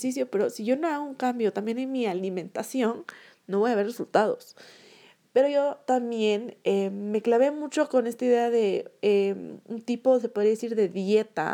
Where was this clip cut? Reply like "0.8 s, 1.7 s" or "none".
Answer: none